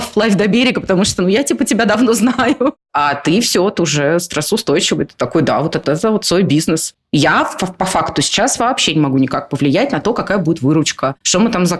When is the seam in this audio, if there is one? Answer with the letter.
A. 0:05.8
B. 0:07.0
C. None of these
A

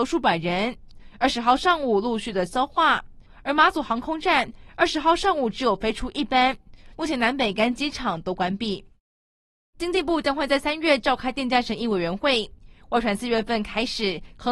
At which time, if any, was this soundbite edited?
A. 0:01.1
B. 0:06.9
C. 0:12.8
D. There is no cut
B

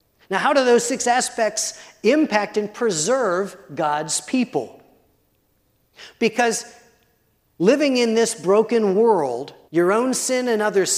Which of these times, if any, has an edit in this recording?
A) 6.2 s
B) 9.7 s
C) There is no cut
B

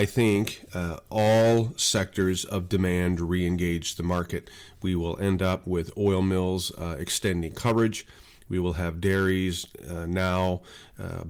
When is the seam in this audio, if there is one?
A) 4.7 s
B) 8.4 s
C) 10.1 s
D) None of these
D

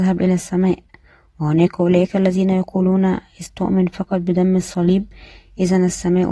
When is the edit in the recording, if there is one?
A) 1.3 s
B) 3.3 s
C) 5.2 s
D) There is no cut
D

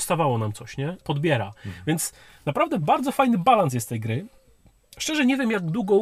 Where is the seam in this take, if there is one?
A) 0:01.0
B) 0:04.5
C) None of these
A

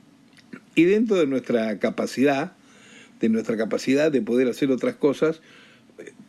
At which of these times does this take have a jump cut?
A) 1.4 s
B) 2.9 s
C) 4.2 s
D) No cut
D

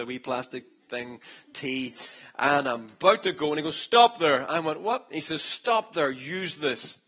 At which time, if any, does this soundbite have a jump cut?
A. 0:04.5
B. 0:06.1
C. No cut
C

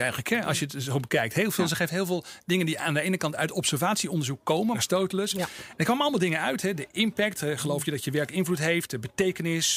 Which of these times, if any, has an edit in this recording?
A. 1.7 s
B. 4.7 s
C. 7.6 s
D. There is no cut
B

